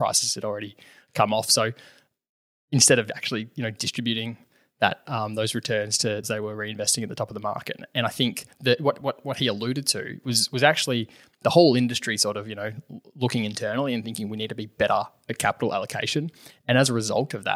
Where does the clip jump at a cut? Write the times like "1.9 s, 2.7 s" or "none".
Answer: 6.2 s